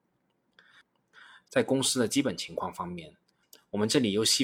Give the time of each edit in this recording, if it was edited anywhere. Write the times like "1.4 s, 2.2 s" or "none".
1.4 s